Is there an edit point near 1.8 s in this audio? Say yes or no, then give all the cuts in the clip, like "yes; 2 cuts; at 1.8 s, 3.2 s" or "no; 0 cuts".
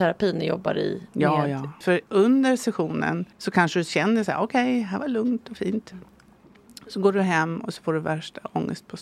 yes; 2 cuts; at 1.8 s, 3.3 s